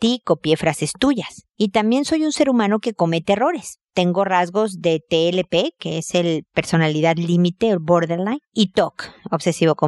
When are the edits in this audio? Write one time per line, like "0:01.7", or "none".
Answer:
0:01.5